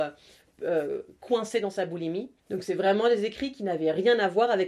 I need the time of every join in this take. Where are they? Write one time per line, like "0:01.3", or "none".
0:02.4